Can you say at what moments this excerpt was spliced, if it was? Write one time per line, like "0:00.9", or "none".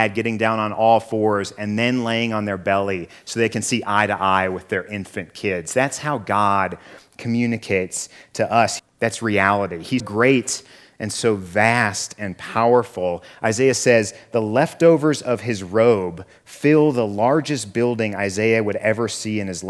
0:08.8
0:10.0